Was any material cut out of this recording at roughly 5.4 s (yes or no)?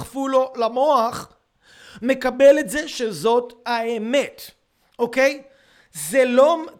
no